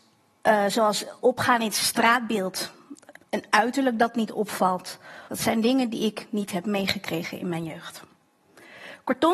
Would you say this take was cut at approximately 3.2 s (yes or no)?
yes